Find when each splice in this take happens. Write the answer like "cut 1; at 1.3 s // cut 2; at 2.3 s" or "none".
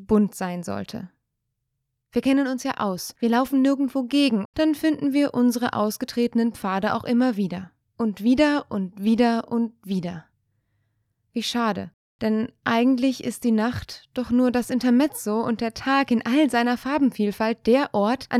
cut 1; at 4.4 s